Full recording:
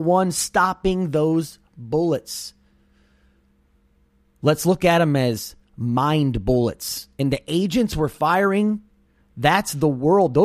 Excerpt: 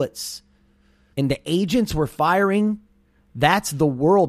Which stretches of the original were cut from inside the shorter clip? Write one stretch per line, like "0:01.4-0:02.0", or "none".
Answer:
0:03.2-0:07.1

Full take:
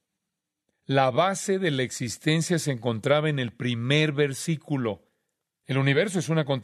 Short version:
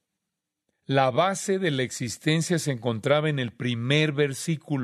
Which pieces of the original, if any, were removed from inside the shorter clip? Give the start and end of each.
none

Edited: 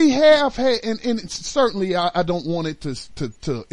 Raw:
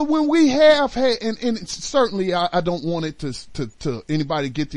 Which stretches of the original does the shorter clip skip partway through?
none

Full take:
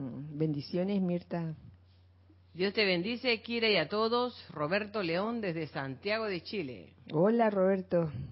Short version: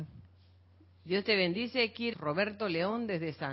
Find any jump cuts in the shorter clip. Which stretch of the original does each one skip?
0:03.6-0:04.5

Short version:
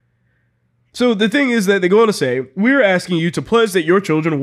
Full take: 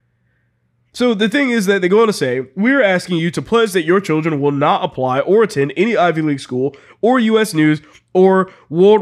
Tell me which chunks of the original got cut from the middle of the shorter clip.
none

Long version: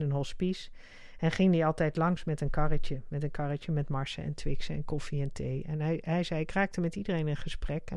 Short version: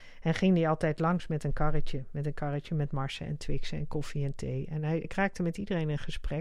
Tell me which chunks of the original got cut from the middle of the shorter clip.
0:06.0-0:06.4

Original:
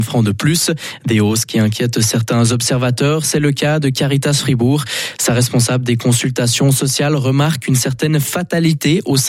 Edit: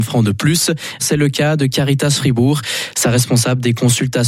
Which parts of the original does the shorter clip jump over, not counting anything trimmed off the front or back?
0:01.0-0:03.2

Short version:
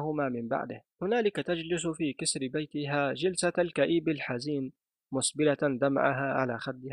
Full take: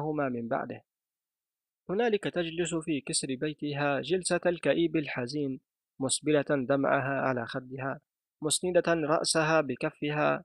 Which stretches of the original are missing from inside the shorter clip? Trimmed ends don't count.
0:00.9-0:01.8

